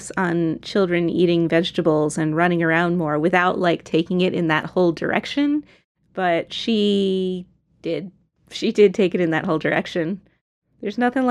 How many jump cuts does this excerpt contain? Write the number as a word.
zero